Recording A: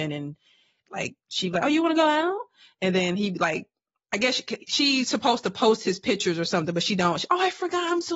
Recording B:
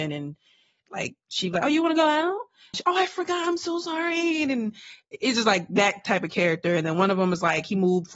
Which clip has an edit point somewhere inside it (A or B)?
B